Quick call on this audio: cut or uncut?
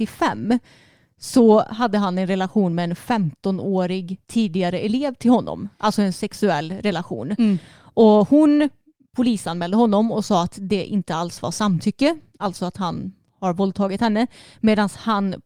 uncut